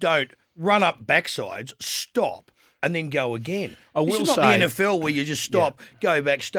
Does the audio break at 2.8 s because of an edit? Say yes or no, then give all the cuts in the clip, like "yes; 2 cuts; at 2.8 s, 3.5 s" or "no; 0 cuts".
yes; 1 cut; at 2.8 s